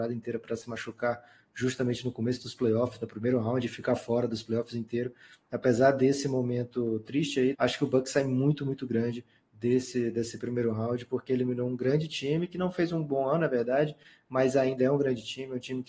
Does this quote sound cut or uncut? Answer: cut